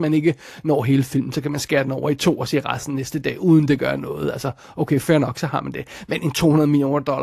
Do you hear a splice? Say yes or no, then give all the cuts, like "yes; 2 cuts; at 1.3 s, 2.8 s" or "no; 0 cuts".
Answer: no; 0 cuts